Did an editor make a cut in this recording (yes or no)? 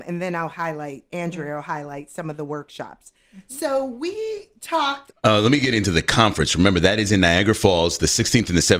yes